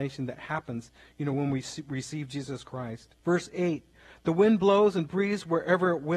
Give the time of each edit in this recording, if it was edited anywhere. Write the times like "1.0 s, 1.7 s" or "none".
3.2 s